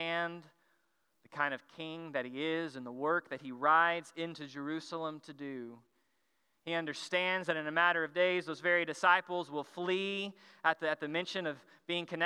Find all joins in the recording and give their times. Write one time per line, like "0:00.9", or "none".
none